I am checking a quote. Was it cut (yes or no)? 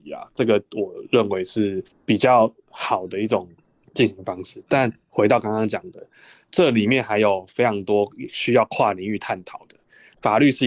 no